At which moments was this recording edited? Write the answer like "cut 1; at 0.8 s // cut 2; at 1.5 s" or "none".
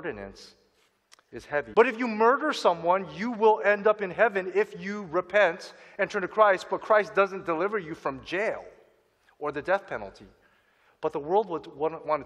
cut 1; at 1.7 s // cut 2; at 10.9 s